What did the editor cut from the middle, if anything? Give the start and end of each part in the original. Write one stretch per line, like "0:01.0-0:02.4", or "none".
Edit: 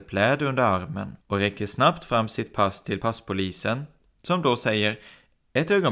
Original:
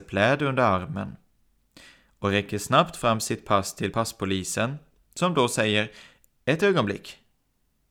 0:01.2-0:02.1